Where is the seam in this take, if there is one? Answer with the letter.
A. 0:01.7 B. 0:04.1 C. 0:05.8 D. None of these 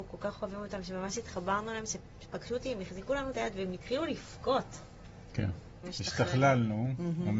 C